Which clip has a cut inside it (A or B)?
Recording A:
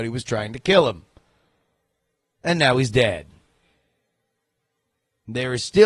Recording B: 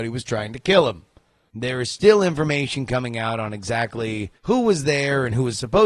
B